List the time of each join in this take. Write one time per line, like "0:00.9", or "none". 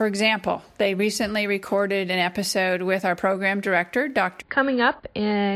0:04.4